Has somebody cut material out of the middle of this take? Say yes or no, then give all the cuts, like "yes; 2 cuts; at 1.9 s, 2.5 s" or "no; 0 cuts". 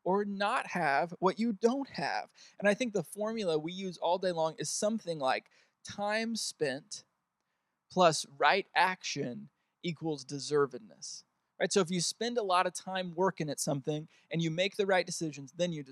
no; 0 cuts